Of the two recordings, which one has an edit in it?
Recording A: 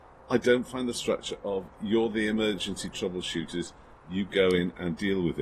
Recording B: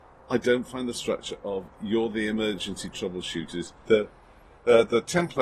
B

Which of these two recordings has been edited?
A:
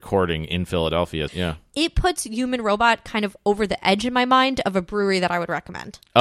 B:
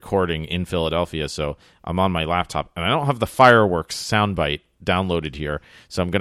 A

